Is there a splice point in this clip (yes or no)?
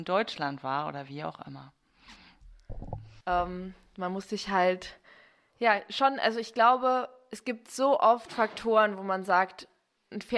yes